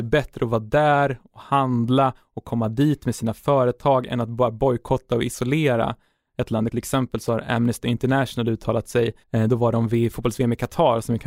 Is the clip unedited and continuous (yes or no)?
no